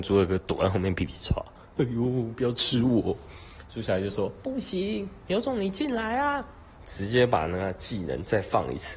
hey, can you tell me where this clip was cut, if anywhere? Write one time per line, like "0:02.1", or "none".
0:06.7